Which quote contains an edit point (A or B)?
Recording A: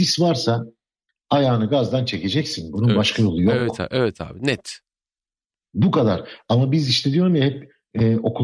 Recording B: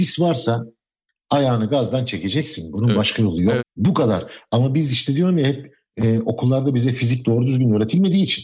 B